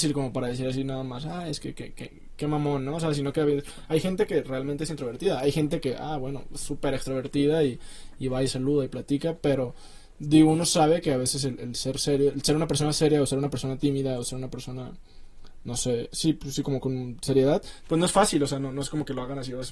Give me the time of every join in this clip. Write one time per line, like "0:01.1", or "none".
none